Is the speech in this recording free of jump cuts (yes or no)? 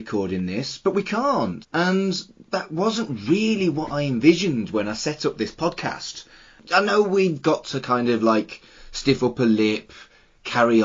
no